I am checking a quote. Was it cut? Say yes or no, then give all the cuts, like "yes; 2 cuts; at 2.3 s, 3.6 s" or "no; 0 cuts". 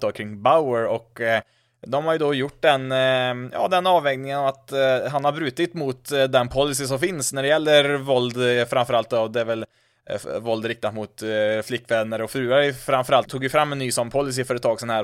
yes; 1 cut; at 13.2 s